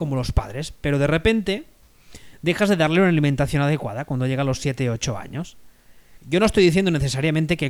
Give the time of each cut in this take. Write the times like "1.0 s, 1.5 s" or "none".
6.2 s